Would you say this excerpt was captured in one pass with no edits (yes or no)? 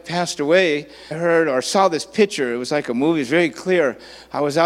no